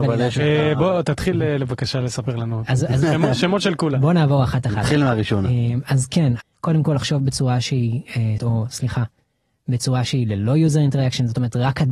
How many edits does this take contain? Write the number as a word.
two